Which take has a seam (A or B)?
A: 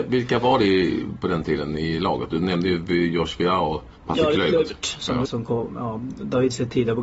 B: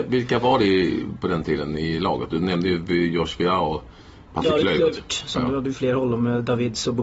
A